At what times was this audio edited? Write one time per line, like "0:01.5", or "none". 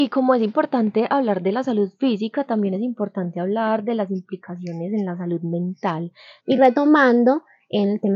0:06.4